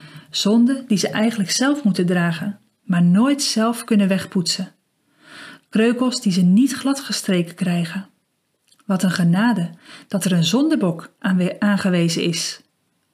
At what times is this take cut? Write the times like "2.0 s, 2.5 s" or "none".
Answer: none